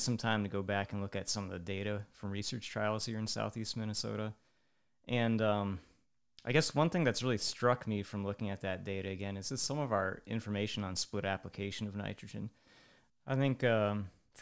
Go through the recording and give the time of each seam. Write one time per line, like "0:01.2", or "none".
0:13.1